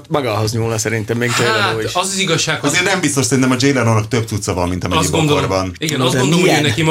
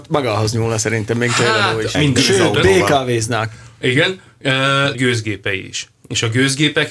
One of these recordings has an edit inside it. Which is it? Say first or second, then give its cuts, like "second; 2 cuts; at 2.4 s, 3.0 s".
second; 2 cuts; at 1.9 s, 4.9 s